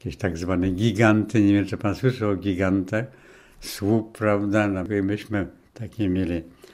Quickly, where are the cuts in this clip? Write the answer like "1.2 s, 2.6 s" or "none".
none